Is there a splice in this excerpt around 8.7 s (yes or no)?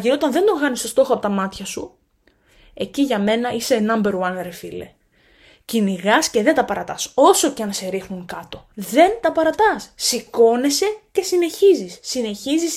yes